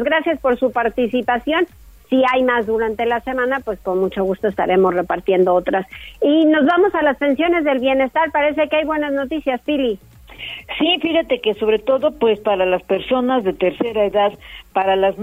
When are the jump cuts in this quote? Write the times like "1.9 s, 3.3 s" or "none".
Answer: none